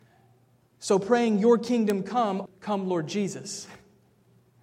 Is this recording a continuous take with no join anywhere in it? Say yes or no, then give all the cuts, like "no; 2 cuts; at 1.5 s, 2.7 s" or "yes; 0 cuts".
no; 1 cut; at 2.5 s